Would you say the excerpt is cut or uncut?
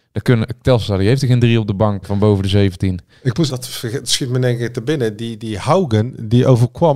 cut